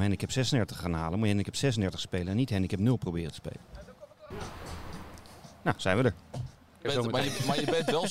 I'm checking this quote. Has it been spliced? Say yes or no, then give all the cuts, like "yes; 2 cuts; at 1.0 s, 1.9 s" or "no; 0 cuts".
yes; 2 cuts; at 4.3 s, 6.8 s